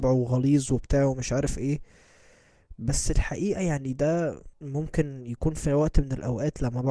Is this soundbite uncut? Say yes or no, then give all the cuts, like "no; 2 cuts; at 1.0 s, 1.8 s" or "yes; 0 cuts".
no; 1 cut; at 4.5 s